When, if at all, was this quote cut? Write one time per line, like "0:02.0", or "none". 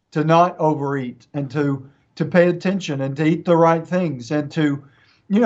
none